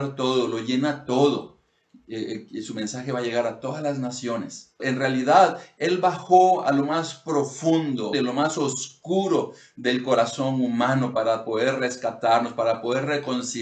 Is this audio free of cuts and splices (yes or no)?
no